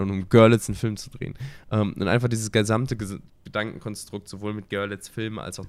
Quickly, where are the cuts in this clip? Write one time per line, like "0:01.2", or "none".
none